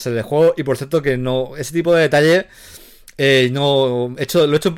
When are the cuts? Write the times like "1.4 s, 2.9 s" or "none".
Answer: none